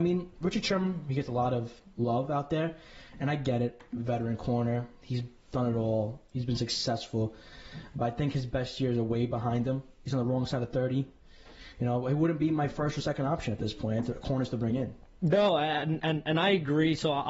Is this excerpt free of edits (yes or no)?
yes